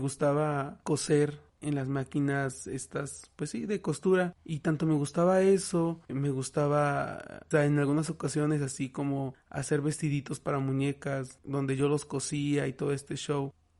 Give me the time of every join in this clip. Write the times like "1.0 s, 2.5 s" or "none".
4.3 s, 6.1 s, 7.5 s